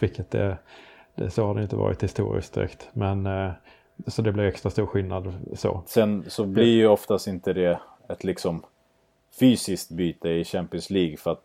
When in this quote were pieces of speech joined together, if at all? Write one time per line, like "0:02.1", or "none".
0:04.0
0:05.9

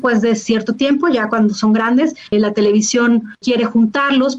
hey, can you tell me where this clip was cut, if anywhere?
0:02.3
0:03.4

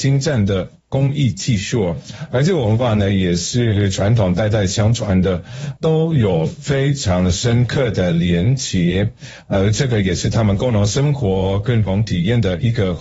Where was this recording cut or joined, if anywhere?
0:05.8

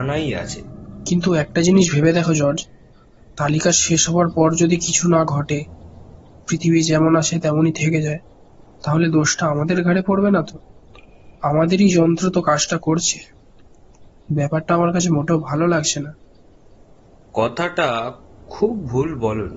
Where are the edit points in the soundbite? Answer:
none

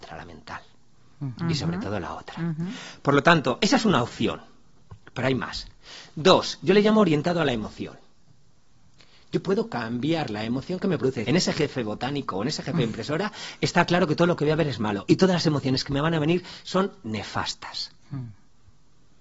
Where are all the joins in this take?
0:11.2

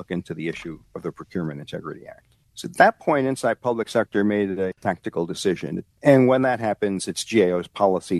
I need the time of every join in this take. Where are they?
0:05.9

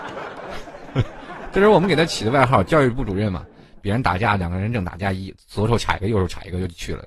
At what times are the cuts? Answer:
0:03.8

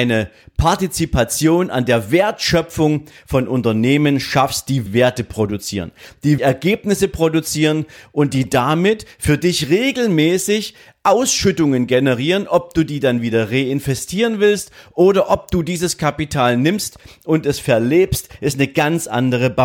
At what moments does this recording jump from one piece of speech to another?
0:04.9
0:06.4

